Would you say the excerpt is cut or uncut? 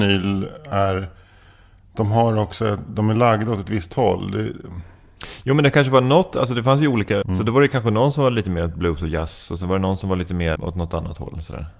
cut